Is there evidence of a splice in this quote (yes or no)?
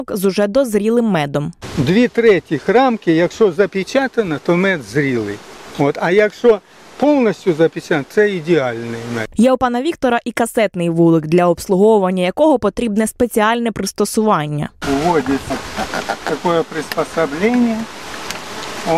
no